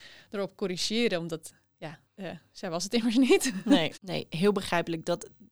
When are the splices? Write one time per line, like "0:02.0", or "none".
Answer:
0:02.1